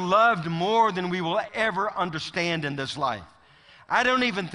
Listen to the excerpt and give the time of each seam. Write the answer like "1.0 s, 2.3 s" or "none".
1.5 s